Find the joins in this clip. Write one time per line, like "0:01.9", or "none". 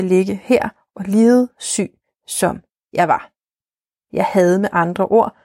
0:04.1